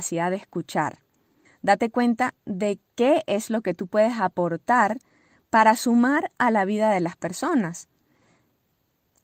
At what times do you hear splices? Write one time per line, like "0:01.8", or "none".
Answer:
0:01.4
0:02.9